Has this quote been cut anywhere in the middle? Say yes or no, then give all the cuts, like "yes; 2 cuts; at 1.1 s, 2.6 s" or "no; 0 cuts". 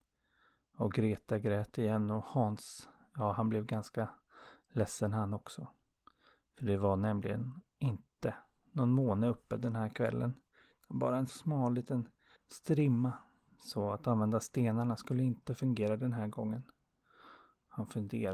yes; 1 cut; at 11.3 s